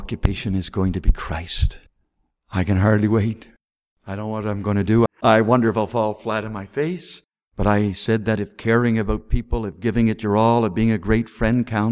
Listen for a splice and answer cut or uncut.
cut